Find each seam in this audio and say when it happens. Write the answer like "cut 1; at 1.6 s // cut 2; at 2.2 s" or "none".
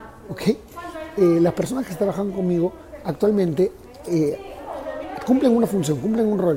none